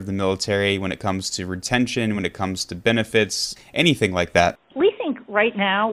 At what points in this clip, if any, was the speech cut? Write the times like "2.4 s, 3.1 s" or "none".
none